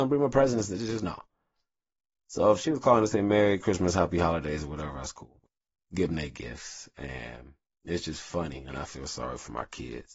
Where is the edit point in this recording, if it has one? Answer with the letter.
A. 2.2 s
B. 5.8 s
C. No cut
B